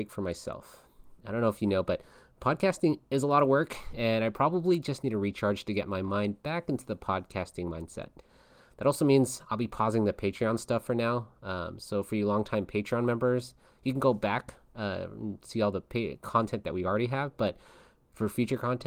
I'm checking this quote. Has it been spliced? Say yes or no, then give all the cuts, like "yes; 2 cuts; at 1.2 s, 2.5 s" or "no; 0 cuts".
no; 0 cuts